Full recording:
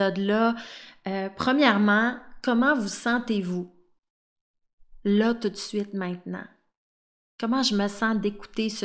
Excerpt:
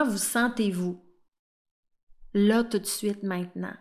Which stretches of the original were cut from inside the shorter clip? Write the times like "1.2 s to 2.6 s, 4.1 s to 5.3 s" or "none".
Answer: none